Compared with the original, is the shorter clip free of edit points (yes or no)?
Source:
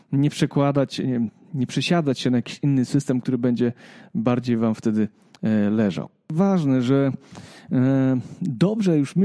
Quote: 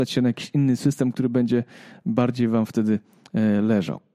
yes